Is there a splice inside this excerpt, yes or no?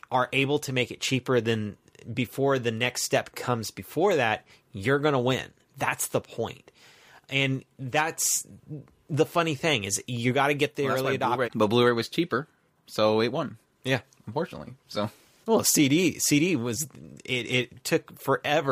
yes